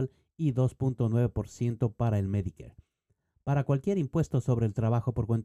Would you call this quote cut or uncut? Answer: uncut